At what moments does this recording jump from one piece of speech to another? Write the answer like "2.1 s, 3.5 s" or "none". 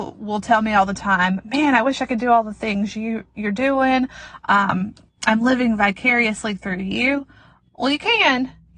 none